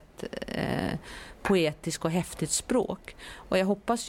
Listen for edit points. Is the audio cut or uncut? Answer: uncut